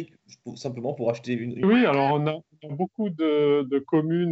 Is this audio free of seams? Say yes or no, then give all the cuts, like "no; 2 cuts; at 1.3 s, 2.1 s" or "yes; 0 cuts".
no; 1 cut; at 1.6 s